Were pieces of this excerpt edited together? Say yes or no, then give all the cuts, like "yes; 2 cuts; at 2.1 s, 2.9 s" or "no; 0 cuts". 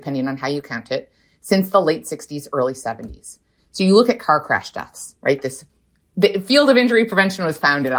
yes; 1 cut; at 3.6 s